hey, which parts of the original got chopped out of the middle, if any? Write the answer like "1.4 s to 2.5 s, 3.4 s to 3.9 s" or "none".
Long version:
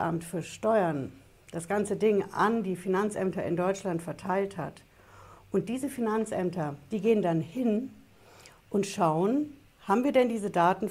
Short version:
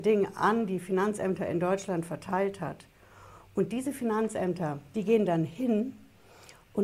none